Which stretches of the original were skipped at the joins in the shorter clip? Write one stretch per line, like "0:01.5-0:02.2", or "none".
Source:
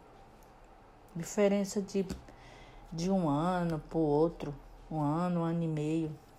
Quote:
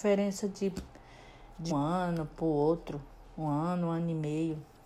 0:03.0-0:03.2